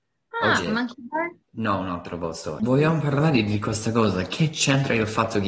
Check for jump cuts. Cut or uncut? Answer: cut